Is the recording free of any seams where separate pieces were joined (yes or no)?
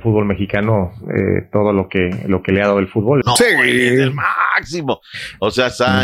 no